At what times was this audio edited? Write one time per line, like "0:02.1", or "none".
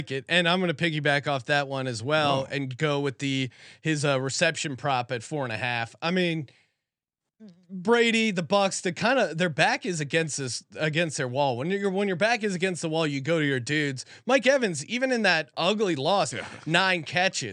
0:16.3